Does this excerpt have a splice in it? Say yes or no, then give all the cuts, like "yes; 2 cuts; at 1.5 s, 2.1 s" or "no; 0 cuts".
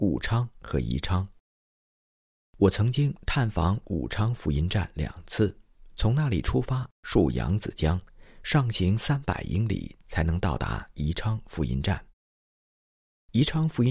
no; 0 cuts